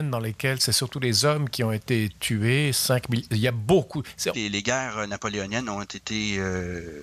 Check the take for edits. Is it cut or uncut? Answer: cut